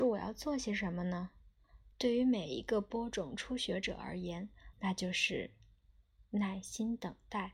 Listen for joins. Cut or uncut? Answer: cut